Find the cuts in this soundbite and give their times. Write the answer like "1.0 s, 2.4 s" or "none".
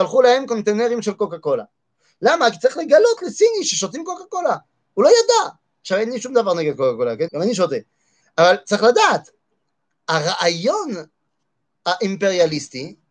7.3 s